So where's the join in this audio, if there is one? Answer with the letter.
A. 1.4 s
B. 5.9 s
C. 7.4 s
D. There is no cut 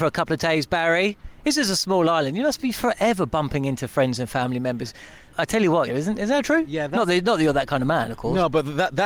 B